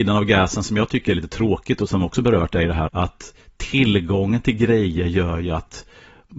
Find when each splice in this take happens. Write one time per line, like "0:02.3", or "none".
0:02.9